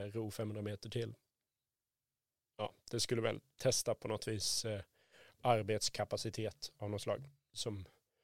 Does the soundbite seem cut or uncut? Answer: uncut